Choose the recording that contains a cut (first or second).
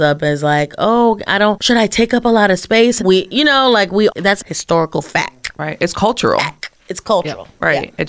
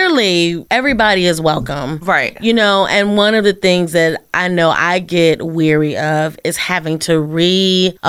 first